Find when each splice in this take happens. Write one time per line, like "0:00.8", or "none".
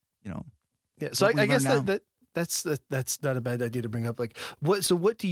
none